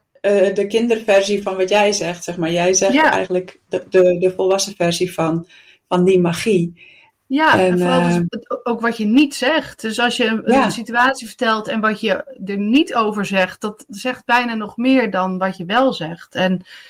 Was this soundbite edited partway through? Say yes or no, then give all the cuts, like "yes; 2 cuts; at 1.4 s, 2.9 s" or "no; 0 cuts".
no; 0 cuts